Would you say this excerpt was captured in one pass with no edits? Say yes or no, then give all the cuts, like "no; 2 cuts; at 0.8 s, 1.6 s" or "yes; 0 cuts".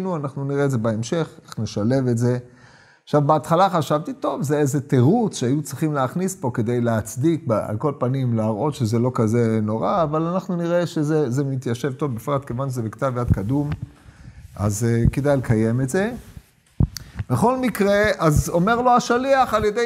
yes; 0 cuts